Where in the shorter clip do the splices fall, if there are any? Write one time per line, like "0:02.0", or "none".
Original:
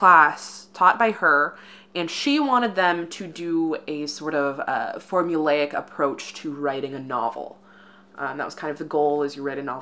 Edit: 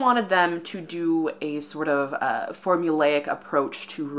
none